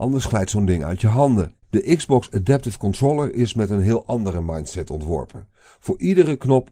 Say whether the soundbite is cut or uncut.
cut